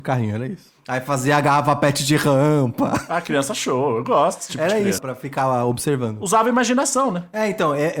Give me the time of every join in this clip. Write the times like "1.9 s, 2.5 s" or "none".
5.0 s

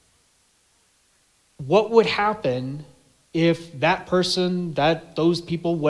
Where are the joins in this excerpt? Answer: 1.4 s

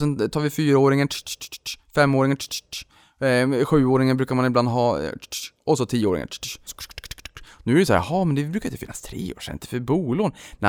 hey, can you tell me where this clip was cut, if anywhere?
6.7 s

